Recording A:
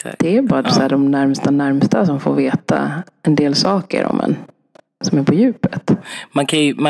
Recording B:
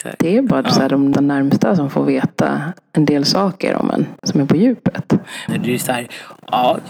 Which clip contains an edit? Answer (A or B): B